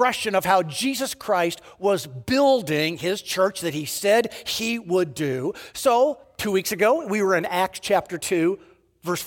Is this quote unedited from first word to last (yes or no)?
yes